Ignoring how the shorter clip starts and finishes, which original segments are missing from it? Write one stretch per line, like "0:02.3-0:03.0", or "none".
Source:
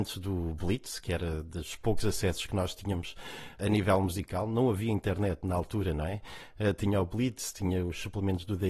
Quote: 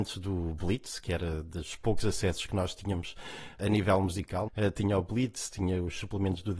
0:04.5-0:06.5